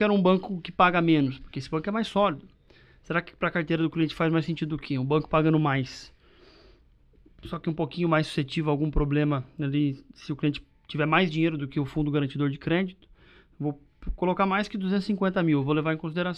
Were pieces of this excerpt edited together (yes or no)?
no